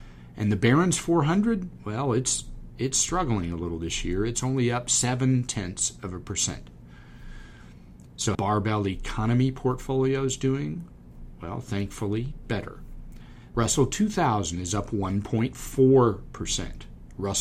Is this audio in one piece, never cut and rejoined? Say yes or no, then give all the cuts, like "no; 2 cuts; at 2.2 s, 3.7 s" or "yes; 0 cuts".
no; 2 cuts; at 8.3 s, 13.5 s